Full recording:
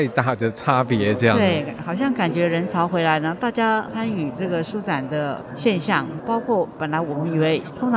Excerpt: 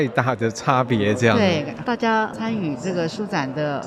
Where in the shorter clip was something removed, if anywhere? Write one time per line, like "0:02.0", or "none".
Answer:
0:01.8